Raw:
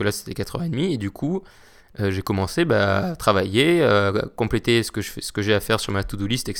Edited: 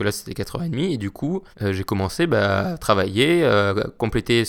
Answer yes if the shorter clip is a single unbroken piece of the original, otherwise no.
no